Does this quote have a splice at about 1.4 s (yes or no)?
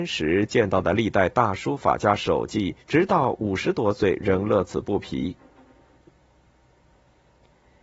no